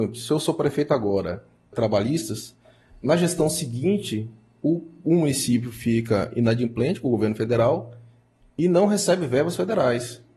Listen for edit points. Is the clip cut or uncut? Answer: cut